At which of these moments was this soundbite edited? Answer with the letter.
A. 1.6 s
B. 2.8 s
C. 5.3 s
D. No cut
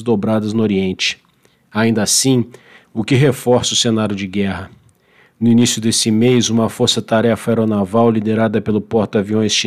B